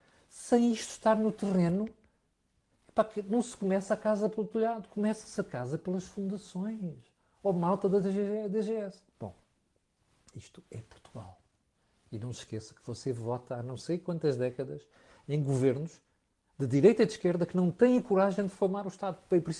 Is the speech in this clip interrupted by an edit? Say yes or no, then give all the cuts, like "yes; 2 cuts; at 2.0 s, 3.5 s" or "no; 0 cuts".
no; 0 cuts